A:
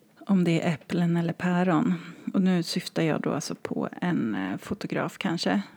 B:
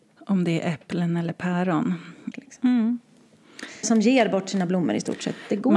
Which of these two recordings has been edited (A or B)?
B